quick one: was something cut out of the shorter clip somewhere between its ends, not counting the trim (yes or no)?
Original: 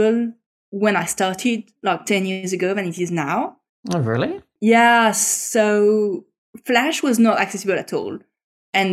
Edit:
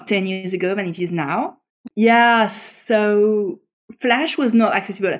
yes